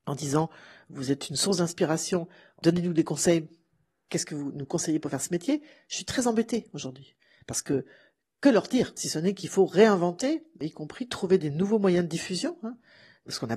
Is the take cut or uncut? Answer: uncut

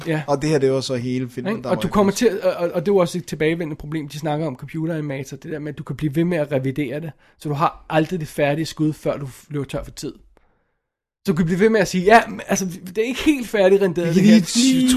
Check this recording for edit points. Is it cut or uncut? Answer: uncut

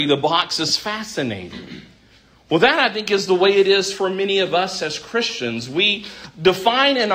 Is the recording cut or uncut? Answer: uncut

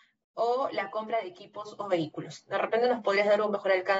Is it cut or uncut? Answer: uncut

